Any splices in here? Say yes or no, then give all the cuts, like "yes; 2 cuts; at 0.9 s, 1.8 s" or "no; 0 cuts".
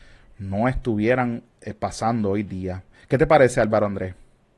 no; 0 cuts